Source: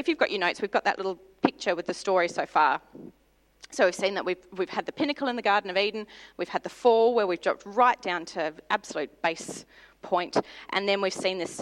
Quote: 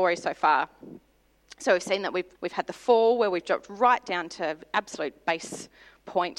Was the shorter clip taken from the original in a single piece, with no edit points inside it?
no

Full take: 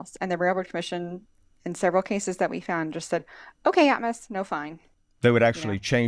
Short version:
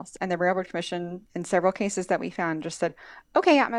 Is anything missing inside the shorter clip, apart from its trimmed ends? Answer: yes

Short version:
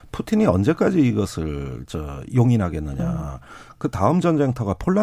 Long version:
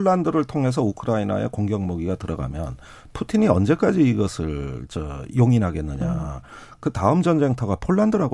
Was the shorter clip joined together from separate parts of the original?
no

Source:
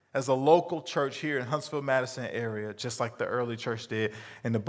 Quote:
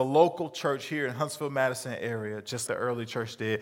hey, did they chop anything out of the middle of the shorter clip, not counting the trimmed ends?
yes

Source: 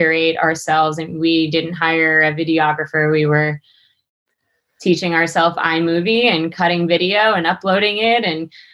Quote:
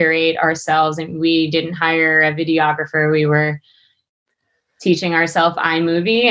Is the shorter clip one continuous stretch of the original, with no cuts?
yes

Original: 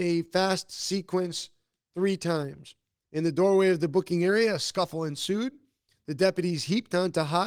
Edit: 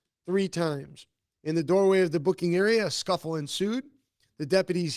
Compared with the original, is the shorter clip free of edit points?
yes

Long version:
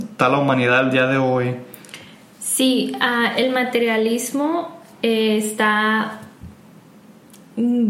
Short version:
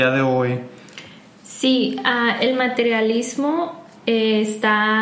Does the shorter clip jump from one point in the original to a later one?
no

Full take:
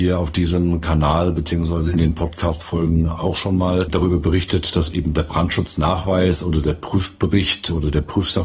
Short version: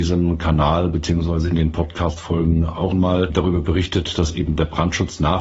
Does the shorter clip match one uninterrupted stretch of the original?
no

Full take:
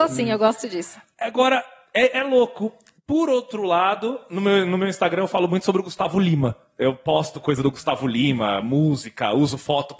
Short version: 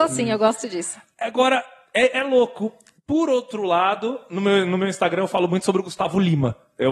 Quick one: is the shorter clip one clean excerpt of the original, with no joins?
yes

